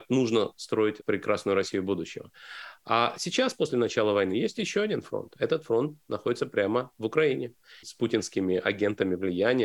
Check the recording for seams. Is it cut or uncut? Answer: cut